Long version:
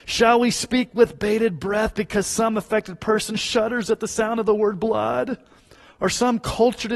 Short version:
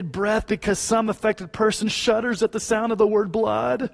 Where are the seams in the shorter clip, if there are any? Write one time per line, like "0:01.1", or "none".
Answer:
none